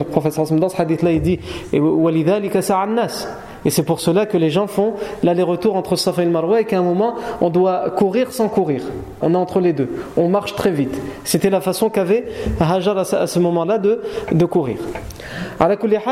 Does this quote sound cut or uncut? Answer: cut